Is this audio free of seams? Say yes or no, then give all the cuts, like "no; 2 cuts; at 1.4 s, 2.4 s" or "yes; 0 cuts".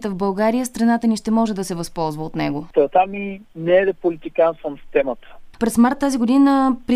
no; 2 cuts; at 2.7 s, 5.5 s